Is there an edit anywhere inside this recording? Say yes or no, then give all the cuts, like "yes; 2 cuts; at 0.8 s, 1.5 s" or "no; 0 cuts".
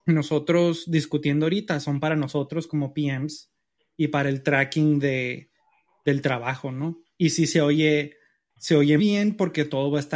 yes; 1 cut; at 9.0 s